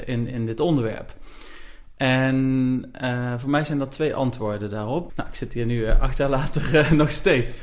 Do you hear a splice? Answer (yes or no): yes